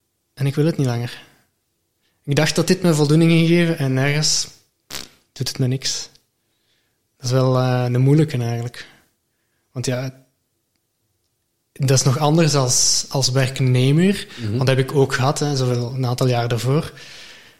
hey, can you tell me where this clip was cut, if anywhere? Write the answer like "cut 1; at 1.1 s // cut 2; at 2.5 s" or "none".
none